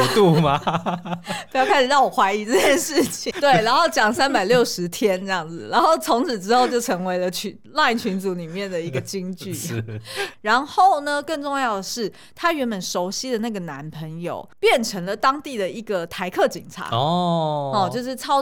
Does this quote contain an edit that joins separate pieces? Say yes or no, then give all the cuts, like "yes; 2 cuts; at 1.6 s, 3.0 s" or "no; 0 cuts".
yes; 3 cuts; at 3.3 s, 10.3 s, 14.5 s